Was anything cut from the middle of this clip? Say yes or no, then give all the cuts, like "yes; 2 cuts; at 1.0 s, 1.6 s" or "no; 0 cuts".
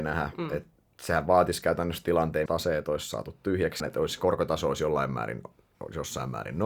yes; 2 cuts; at 2.5 s, 3.8 s